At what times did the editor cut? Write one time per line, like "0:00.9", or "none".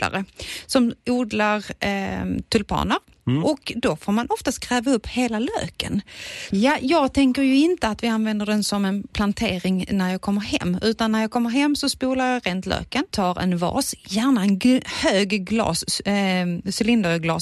0:06.5
0:09.1

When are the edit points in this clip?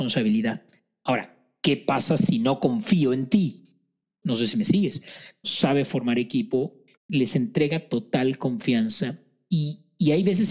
0:04.2
0:05.4
0:06.9

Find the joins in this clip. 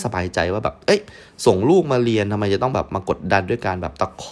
none

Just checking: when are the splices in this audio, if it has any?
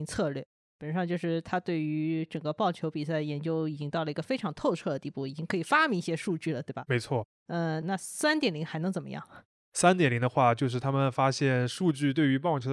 0:07.8

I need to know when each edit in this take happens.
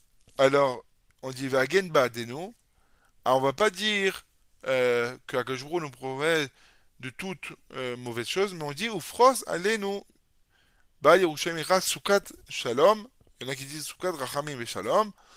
none

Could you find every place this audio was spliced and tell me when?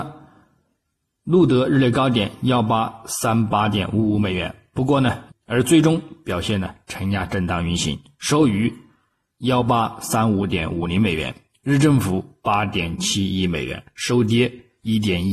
0:05.3

